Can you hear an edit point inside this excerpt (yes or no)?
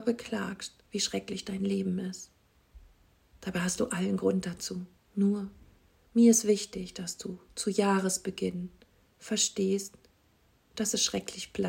yes